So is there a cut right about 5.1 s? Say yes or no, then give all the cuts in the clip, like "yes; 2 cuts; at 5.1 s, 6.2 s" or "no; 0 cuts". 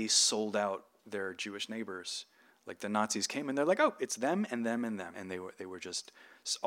yes; 1 cut; at 5.1 s